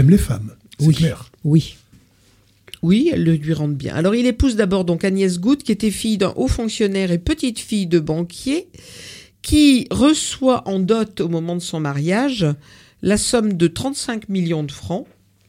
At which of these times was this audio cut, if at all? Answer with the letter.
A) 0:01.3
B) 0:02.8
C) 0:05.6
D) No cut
D